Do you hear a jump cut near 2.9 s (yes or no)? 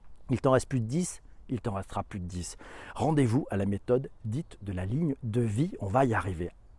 no